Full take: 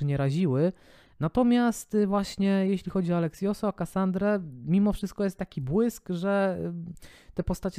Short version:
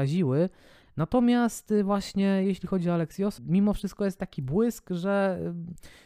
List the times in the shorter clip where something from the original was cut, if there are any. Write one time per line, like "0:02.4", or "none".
0:03.4